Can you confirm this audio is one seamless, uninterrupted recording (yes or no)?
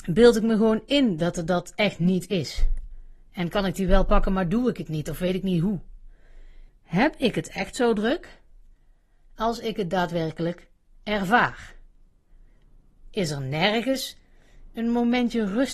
no